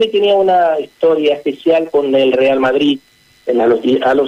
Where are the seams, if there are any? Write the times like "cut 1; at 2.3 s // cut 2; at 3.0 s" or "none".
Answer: cut 1; at 3.3 s